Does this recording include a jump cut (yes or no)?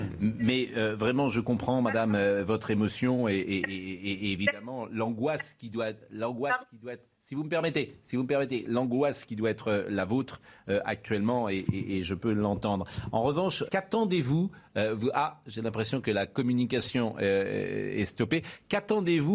yes